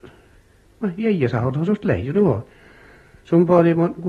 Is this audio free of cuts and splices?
yes; 0 cuts

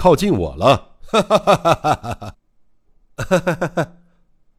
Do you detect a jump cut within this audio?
yes; 1 cut; at 2.9 s

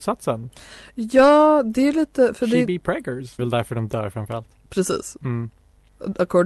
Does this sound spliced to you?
yes; 1 cut; at 3.4 s

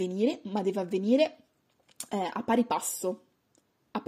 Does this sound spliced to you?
no; 0 cuts

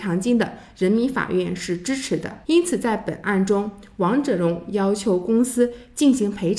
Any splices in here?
yes; 1 cut; at 2.4 s

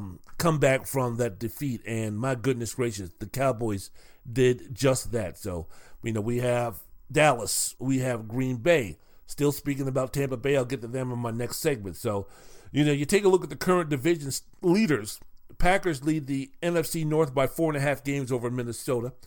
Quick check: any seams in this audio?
yes; 1 cut; at 7.8 s

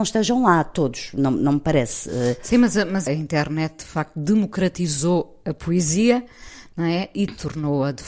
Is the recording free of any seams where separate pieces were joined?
no; 1 cut; at 3.1 s

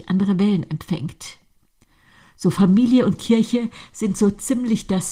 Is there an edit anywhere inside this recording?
no; 0 cuts

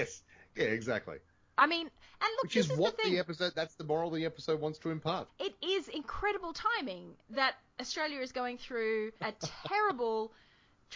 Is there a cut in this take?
yes; 2 cuts; at 5.3 s, 9.2 s

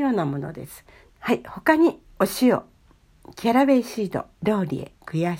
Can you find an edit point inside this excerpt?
yes; 2 cuts; at 1.1 s, 4.3 s

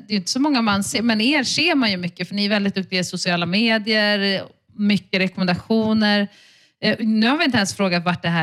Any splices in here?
no; 0 cuts

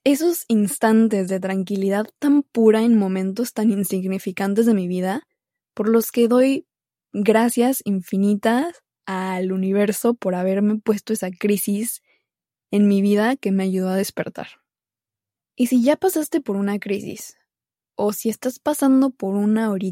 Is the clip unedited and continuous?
yes; 0 cuts

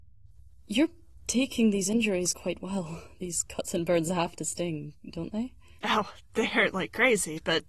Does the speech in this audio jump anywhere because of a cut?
no; 0 cuts

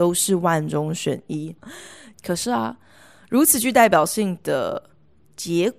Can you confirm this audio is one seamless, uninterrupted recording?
no; 1 cut; at 2.1 s

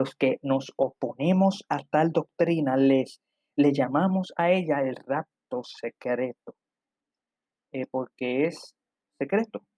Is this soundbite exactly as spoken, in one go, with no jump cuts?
yes; 0 cuts

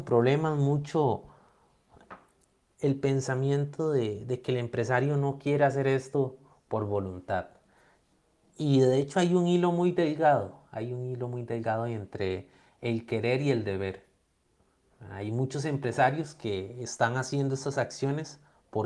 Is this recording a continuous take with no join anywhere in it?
yes; 0 cuts

